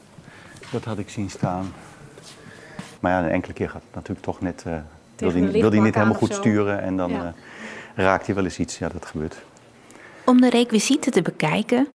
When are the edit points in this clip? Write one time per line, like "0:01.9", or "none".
0:03.0